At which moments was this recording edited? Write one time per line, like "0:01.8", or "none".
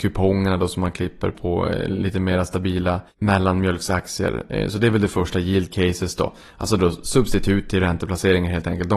0:01.3